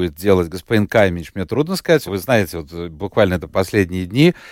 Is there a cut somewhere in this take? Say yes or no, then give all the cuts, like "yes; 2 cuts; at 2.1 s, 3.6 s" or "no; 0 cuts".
yes; 1 cut; at 2.1 s